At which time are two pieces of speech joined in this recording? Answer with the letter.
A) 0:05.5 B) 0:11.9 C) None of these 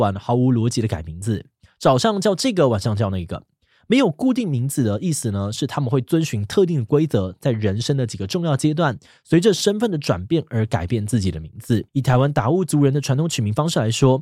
B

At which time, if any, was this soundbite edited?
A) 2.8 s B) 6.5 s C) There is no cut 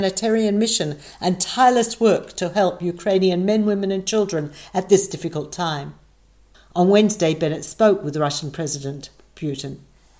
B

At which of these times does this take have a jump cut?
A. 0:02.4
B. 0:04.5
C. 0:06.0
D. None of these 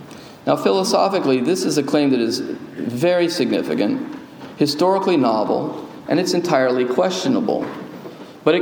C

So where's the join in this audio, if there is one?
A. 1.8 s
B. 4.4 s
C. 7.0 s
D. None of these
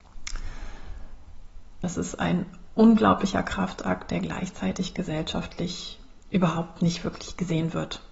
A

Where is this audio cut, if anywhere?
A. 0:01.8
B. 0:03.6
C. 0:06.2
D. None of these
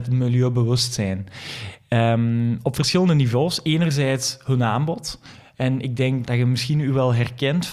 C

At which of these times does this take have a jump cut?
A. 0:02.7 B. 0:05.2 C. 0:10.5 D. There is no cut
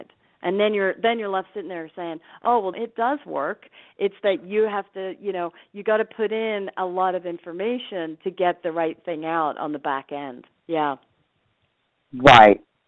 A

